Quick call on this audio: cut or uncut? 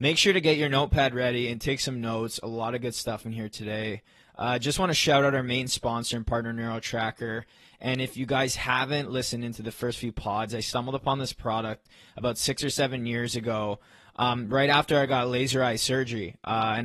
uncut